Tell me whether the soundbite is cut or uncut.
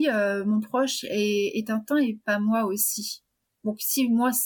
uncut